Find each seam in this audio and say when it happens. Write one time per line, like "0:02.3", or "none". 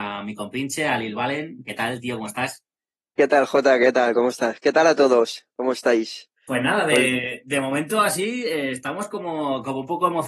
0:06.4